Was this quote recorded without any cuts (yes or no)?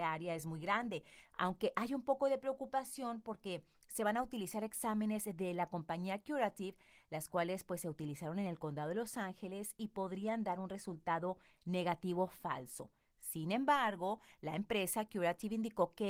yes